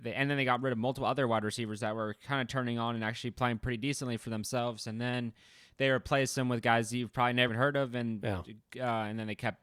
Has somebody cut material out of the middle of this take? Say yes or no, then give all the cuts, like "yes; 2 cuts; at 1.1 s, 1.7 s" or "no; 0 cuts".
yes; 1 cut; at 7.5 s